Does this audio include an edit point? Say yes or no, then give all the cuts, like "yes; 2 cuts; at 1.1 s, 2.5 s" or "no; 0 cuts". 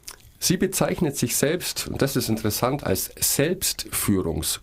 no; 0 cuts